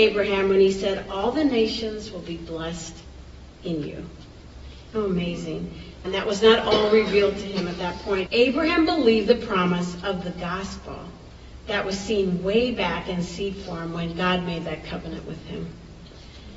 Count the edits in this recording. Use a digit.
3